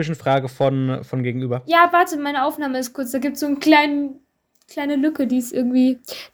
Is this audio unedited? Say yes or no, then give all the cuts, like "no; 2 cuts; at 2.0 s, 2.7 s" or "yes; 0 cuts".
yes; 0 cuts